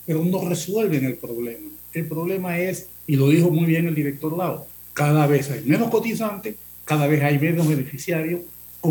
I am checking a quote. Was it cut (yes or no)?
yes